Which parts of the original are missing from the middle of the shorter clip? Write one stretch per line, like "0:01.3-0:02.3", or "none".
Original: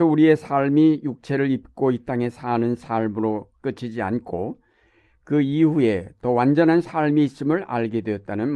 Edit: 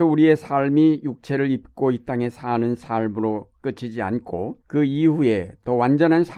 0:04.6-0:05.2